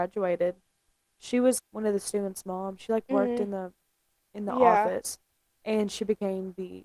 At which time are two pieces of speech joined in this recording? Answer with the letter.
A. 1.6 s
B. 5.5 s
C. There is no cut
A